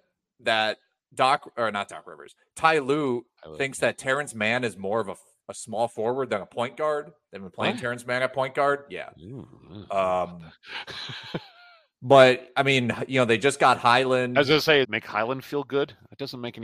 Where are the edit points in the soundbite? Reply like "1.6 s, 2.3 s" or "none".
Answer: 14.8 s